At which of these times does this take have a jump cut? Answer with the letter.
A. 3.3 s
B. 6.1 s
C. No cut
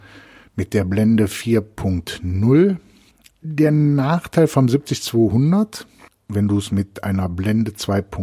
A